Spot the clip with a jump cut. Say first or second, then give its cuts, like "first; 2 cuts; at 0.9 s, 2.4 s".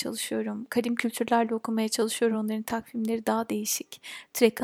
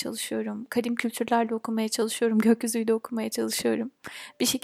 first; 1 cut; at 2.3 s